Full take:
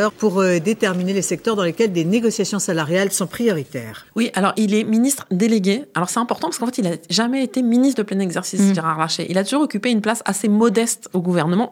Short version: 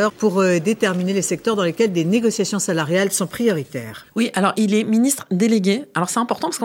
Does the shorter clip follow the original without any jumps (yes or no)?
yes